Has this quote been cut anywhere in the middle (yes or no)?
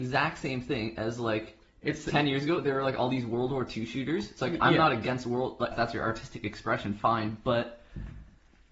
yes